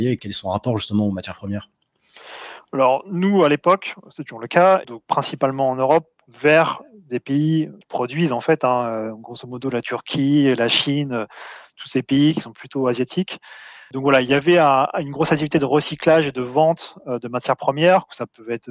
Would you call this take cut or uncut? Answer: cut